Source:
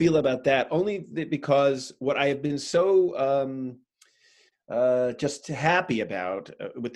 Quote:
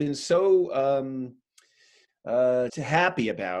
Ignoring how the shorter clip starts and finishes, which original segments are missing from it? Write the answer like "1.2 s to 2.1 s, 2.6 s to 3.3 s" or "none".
5.1 s to 5.4 s